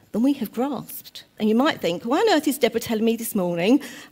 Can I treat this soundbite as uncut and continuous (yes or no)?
no